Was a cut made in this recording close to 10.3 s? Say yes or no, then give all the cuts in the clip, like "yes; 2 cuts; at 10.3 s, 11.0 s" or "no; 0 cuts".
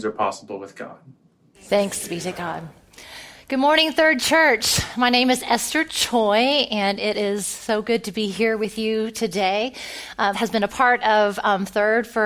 yes; 2 cuts; at 1.5 s, 10.3 s